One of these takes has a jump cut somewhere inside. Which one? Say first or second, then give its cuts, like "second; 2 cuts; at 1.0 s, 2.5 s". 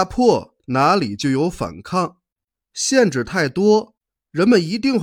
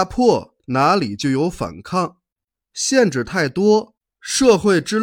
second; 1 cut; at 4.1 s